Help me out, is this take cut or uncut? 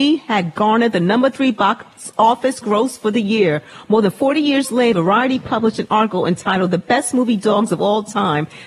cut